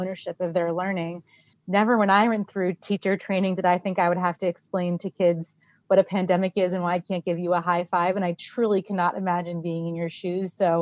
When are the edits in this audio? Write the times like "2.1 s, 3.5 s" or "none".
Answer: 1.5 s